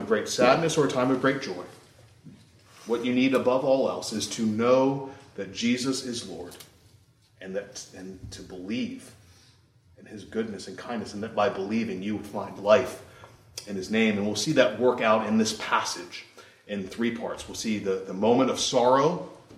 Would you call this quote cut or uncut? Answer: uncut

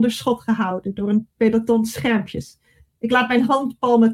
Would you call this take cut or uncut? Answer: uncut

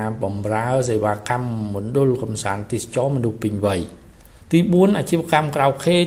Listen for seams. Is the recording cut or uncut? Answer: uncut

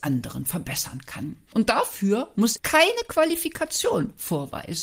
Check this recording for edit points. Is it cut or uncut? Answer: cut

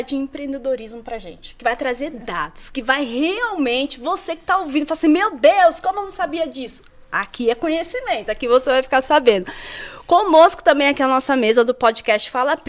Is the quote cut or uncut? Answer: uncut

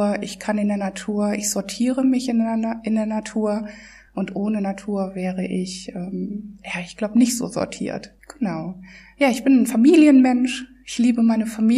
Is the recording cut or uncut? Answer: uncut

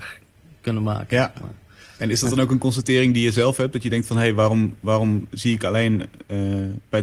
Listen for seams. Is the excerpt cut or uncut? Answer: uncut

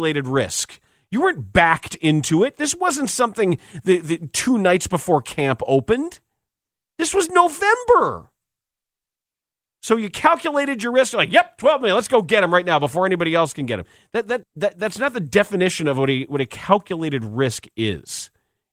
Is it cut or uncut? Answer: cut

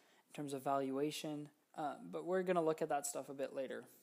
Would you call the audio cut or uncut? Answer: uncut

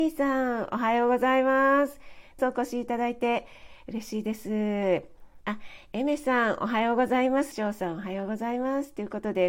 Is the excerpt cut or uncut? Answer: cut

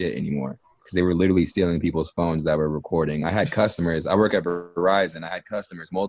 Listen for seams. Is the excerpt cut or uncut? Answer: uncut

